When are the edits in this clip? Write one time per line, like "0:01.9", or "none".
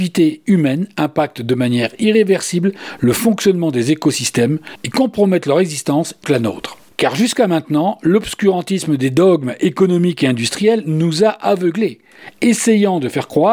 0:06.2